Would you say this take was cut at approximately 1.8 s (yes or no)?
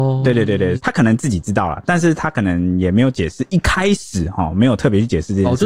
no